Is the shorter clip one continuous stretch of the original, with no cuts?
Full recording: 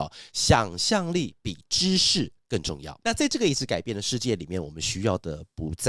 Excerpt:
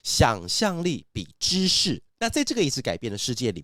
no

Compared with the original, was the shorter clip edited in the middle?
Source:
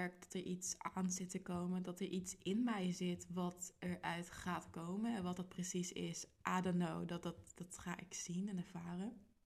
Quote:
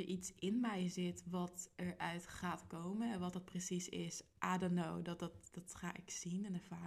no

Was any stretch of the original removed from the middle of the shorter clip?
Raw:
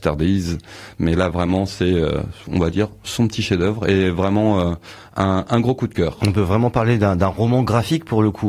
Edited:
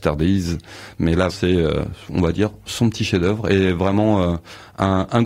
yes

